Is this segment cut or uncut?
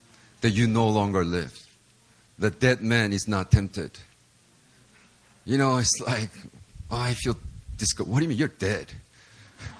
uncut